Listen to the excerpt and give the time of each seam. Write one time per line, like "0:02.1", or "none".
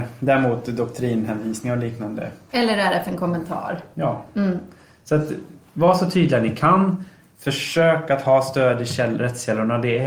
0:02.5